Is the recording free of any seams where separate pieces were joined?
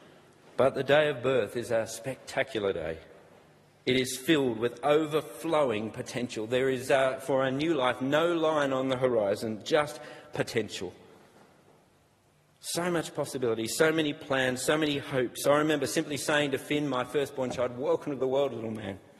yes; 0 cuts

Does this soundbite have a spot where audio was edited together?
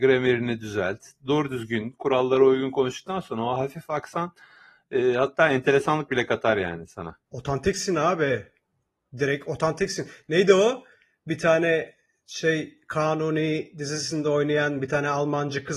yes; 1 cut; at 7.3 s

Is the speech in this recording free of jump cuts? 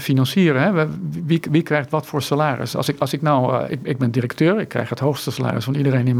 yes; 0 cuts

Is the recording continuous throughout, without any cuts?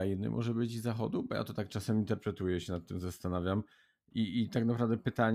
yes; 0 cuts

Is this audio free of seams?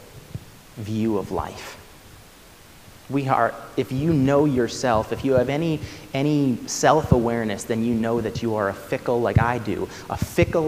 no; 1 cut; at 3.0 s

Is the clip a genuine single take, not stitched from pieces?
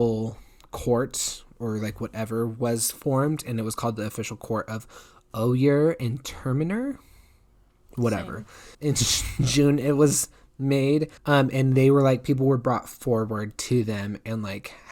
no; 2 cuts; at 8.7 s, 11.2 s

